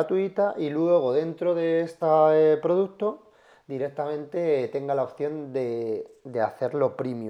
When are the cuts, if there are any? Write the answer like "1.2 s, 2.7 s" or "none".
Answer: none

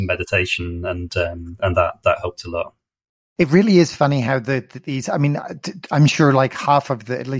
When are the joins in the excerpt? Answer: none

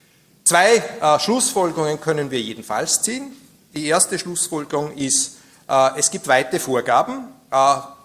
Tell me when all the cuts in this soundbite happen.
none

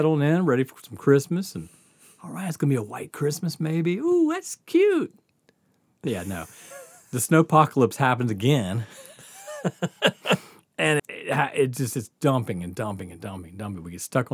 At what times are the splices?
11.0 s

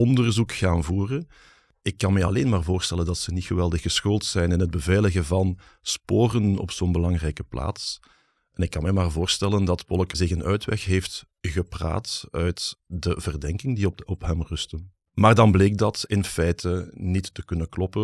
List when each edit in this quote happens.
none

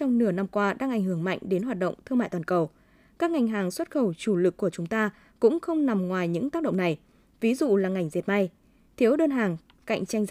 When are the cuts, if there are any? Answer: none

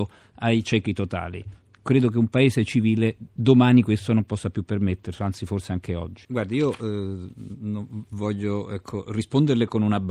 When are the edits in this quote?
6.2 s

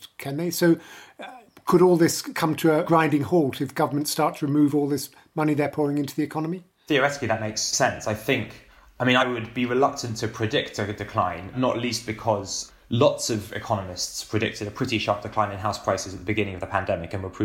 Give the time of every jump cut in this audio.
none

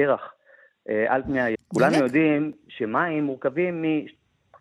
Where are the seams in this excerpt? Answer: 1.6 s

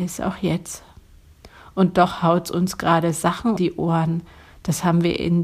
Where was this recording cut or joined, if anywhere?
3.6 s

